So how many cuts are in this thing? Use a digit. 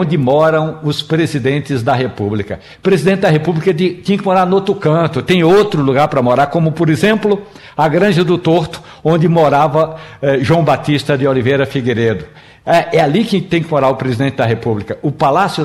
0